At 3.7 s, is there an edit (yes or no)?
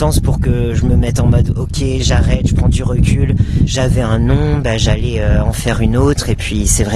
yes